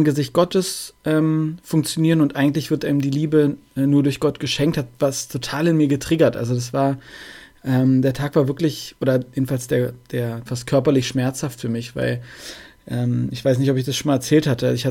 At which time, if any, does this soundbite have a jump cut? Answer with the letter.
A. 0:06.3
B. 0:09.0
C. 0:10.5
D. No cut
C